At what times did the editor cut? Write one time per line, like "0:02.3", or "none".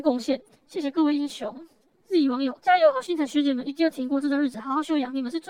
none